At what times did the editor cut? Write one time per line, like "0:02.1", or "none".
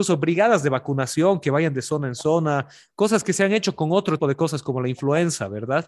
0:04.2